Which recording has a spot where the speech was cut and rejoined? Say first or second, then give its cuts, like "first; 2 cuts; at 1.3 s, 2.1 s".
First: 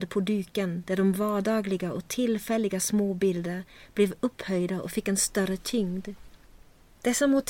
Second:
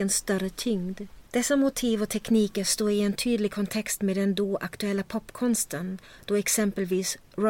second; 1 cut; at 1.3 s